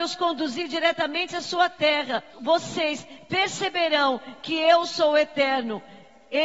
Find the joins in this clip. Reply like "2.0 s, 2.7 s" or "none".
2.3 s